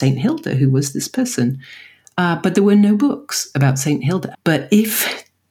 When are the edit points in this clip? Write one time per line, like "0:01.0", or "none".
0:04.3